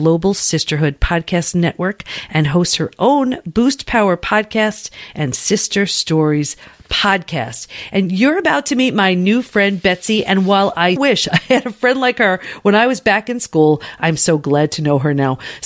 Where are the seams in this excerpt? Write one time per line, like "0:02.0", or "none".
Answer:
0:11.0